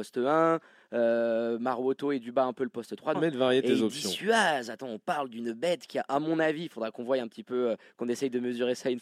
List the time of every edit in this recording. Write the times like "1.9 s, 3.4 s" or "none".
3.1 s